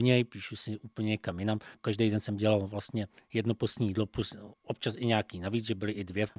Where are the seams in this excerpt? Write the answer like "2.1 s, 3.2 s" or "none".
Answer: 1.7 s